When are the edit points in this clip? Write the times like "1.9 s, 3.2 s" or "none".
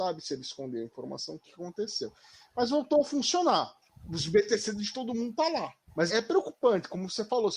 6.1 s